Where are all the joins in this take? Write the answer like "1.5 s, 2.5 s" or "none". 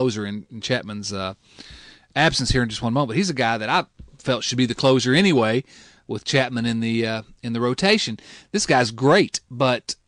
none

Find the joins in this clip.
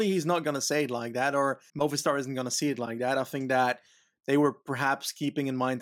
1.7 s

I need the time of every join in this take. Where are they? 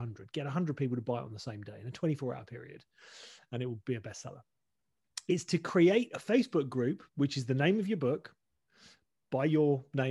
7.1 s

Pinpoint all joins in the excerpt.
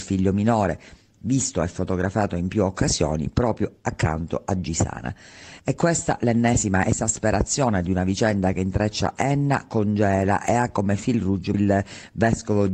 5.6 s, 11.5 s

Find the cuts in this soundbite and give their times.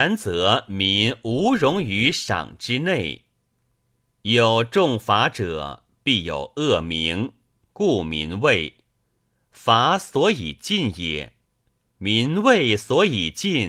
none

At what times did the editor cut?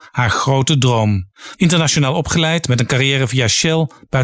1.6 s

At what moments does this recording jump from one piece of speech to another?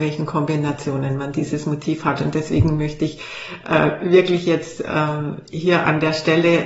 none

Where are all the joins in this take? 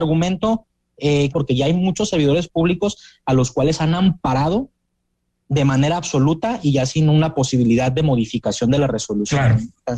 1.3 s

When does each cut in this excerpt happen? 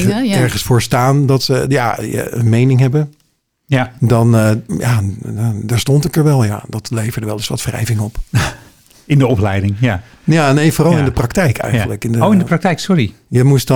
none

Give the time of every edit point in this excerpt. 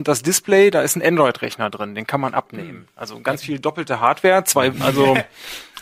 4.7 s

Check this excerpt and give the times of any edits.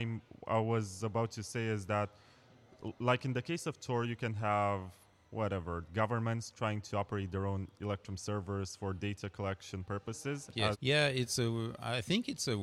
10.7 s

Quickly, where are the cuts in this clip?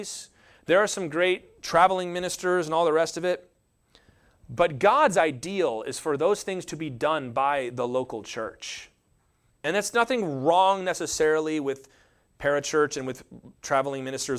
9.5 s

